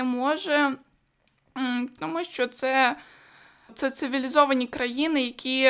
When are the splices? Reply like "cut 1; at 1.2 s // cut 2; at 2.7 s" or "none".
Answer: cut 1; at 3.7 s